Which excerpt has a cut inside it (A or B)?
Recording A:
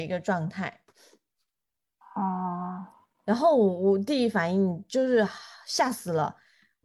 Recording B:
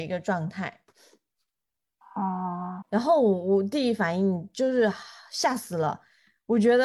B